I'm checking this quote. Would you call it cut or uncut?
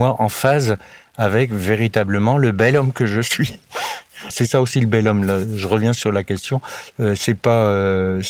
cut